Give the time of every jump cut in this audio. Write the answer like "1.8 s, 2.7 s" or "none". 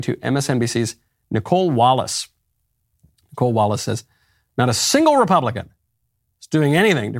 none